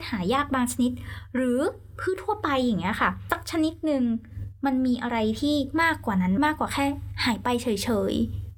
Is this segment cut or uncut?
cut